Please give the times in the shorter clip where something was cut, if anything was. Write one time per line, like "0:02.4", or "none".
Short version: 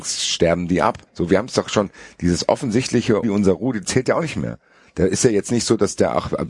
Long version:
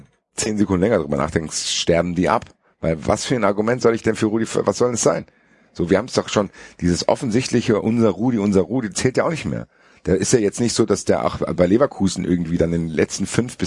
0:01.1
0:03.2